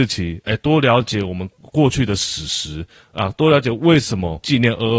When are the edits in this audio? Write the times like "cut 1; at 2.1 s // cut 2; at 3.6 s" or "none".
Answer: none